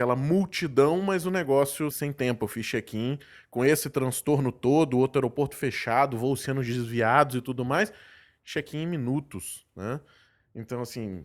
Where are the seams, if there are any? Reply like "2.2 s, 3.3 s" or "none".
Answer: 1.9 s